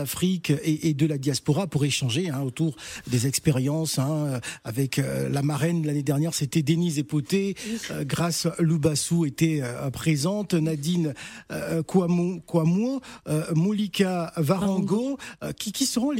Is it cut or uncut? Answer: uncut